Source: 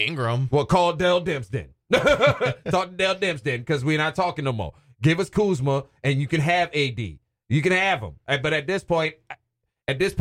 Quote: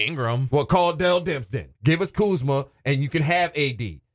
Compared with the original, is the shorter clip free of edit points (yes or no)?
no